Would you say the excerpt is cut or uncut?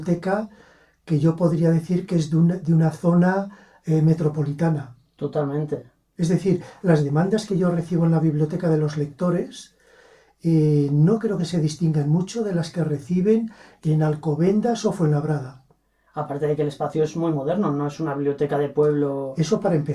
uncut